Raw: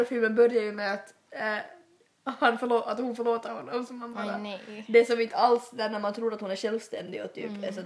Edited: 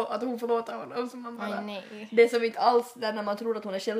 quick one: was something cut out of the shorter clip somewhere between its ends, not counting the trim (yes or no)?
no